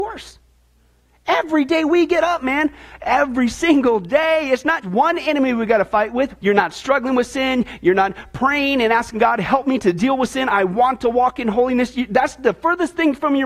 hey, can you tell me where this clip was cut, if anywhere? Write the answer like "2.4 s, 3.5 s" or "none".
4.8 s, 6.4 s

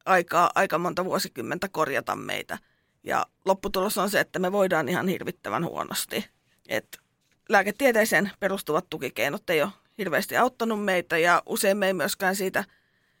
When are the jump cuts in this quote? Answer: none

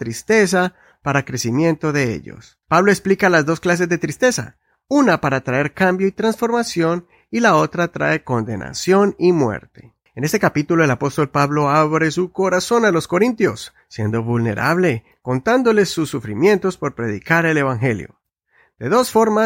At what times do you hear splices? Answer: 2.6 s, 10.1 s

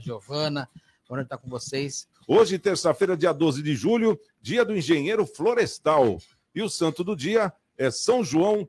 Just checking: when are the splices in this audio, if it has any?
2.1 s

